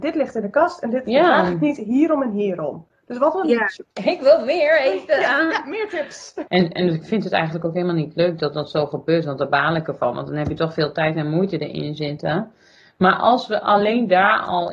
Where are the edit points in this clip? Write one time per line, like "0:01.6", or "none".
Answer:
0:03.9
0:06.5

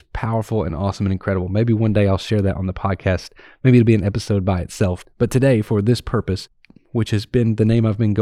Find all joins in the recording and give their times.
0:06.8

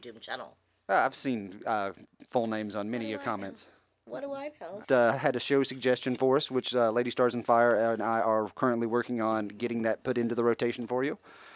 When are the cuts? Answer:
0:04.8

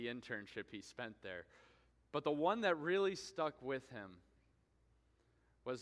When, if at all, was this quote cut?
none

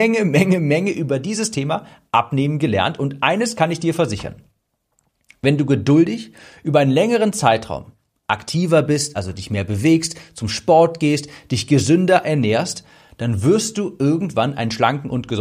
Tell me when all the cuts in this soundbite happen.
none

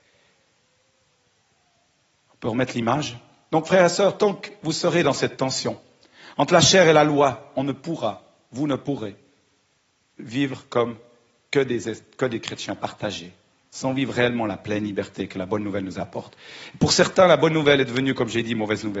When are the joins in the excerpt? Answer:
none

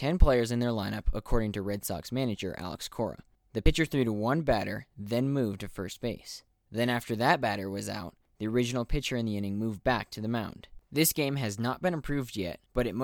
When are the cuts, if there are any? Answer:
0:10.8

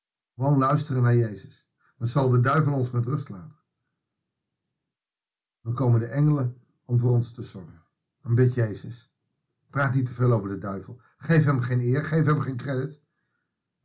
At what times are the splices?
0:08.2

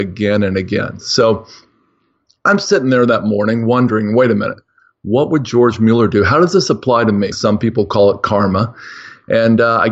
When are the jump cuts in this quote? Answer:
0:07.3

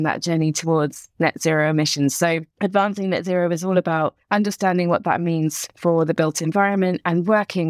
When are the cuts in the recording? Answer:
0:02.5
0:04.2

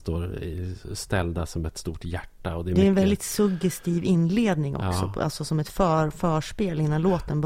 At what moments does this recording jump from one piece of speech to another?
none

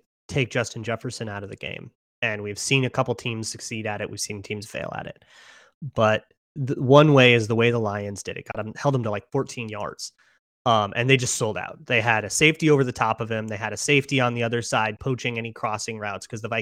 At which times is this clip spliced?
none

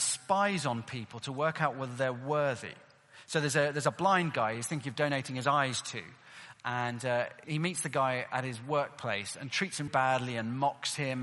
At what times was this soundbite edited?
0:07.4
0:09.9

